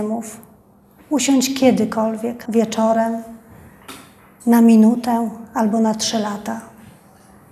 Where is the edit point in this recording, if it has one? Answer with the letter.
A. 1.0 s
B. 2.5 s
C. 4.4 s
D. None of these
B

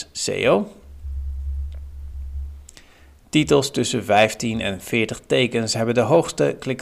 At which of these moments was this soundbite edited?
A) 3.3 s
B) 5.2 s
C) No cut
C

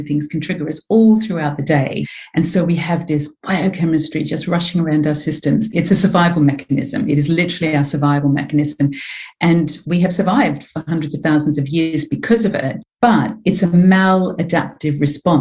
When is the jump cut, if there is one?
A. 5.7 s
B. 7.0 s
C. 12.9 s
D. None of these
A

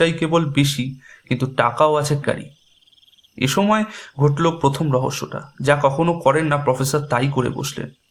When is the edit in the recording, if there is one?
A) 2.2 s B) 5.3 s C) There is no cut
A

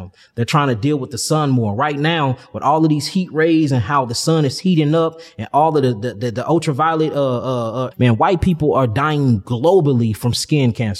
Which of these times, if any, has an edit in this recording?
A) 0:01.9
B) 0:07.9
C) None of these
B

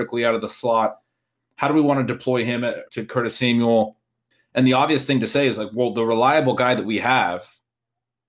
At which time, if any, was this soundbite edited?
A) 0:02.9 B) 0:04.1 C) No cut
A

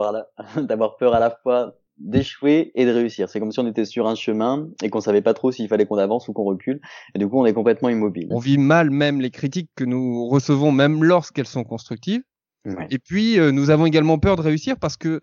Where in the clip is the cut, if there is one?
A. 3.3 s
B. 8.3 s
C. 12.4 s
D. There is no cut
B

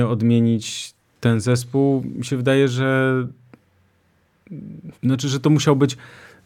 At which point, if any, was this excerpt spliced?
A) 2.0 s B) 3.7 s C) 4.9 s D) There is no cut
C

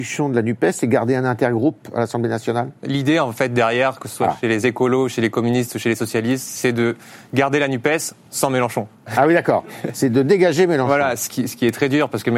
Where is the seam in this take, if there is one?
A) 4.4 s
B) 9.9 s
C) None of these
C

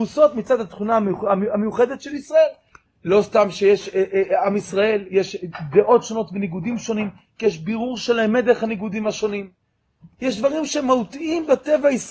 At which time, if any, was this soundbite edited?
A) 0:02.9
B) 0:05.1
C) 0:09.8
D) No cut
A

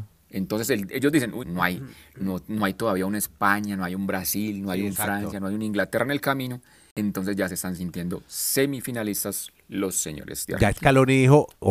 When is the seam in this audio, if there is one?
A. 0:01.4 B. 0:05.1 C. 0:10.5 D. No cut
A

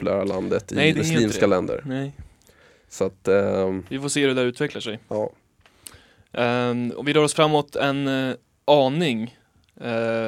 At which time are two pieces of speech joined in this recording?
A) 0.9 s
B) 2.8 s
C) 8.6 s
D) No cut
A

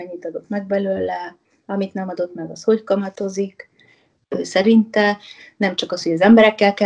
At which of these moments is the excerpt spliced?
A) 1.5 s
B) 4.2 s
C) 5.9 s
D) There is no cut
B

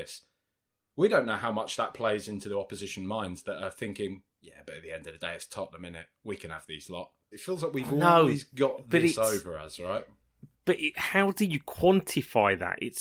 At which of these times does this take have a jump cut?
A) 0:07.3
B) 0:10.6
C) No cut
A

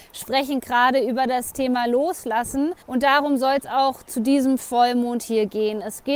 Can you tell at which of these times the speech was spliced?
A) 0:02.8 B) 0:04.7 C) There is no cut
A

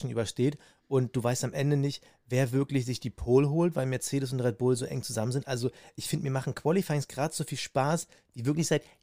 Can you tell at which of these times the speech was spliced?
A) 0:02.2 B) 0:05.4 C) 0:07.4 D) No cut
D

